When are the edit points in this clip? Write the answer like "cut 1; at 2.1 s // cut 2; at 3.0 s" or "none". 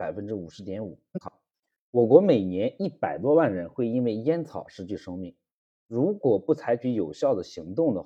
none